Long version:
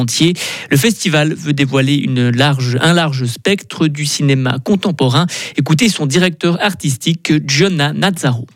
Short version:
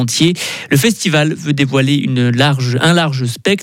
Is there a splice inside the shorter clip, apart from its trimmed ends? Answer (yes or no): no